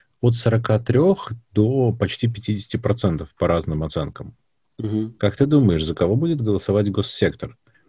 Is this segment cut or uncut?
uncut